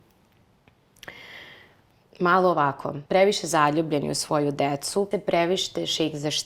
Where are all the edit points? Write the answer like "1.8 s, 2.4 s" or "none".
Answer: 3.1 s, 5.1 s